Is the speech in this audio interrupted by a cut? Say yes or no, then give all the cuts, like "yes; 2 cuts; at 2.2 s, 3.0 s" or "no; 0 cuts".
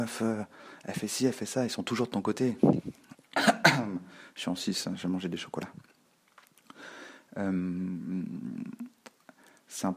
yes; 1 cut; at 3.1 s